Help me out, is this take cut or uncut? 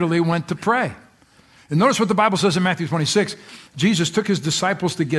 cut